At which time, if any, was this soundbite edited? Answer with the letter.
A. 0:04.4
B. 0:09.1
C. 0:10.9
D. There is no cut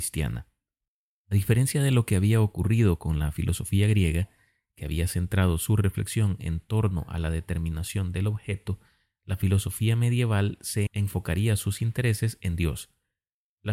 C